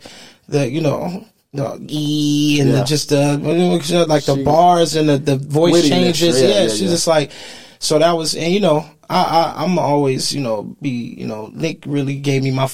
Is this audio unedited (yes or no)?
yes